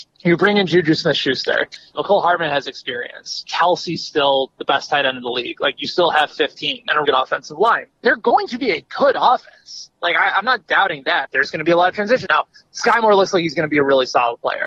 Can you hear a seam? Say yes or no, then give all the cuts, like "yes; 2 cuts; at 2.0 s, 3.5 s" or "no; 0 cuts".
yes; 3 cuts; at 7.0 s, 11.2 s, 12.3 s